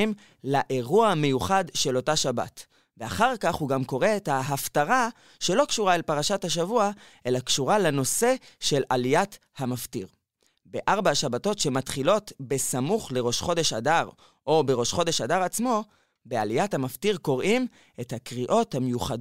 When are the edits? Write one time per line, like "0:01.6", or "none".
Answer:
none